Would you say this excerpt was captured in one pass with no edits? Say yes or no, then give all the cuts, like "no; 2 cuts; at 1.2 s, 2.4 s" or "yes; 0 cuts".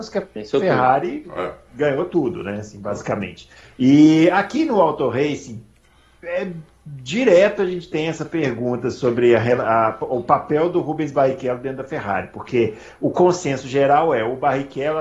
yes; 0 cuts